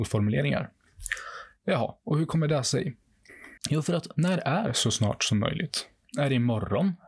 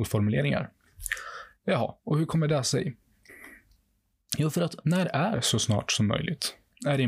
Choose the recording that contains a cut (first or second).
first